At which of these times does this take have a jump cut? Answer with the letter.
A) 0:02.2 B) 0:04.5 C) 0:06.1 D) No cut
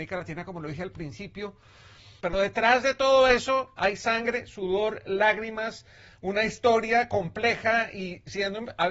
A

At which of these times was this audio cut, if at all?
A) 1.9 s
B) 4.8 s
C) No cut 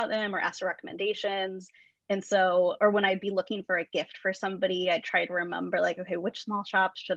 C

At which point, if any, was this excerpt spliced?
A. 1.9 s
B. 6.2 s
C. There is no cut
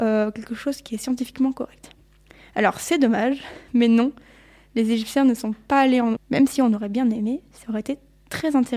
B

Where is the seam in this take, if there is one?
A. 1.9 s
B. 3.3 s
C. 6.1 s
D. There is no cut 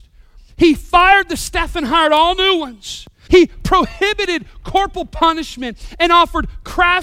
B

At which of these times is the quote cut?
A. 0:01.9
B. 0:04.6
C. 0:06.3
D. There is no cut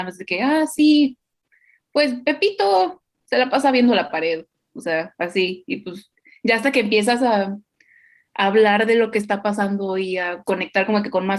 D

